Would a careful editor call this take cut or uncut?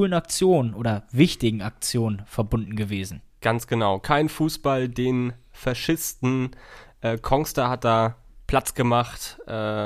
uncut